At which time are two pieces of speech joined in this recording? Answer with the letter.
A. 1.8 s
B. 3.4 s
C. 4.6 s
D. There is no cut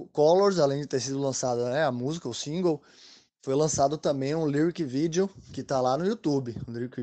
D